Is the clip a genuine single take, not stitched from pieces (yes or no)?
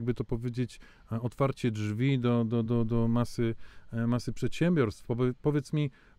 no